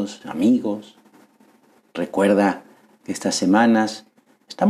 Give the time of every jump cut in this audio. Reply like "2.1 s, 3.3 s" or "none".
1.8 s